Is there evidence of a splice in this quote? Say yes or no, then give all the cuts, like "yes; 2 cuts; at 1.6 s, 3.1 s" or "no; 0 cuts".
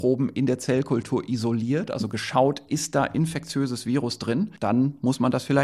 yes; 1 cut; at 4.6 s